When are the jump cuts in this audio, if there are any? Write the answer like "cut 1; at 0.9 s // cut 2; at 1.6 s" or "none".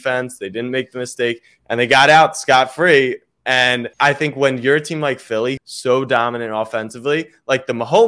cut 1; at 3.9 s // cut 2; at 5.6 s